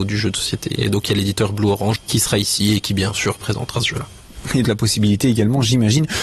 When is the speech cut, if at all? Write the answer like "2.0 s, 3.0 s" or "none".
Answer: 2.0 s, 4.6 s